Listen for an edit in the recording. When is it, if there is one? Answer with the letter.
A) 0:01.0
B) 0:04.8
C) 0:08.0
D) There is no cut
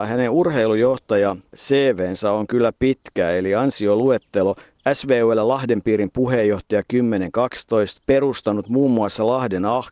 C